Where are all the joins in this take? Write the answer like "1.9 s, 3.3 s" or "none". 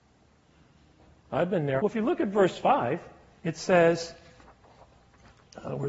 1.8 s